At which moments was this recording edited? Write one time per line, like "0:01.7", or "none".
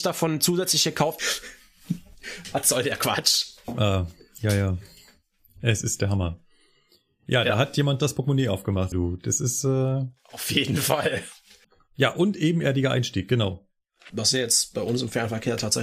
0:01.2
0:08.9
0:11.6

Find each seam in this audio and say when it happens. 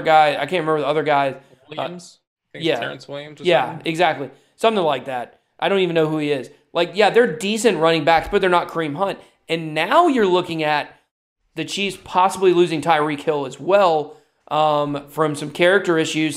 none

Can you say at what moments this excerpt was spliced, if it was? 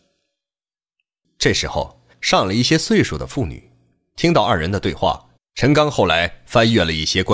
0:02.1
0:05.4

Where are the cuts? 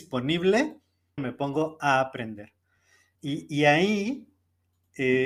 0:01.2
0:03.2

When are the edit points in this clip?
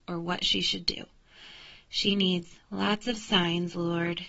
0:02.6

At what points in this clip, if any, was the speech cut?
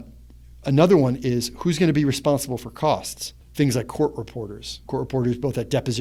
0:03.4
0:04.8

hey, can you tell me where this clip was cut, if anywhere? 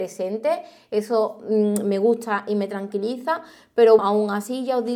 0:04.0

